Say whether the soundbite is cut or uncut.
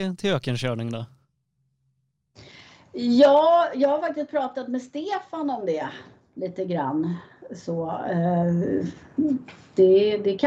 uncut